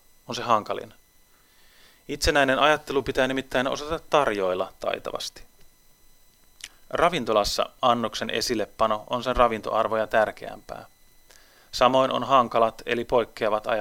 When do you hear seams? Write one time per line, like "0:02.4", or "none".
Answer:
none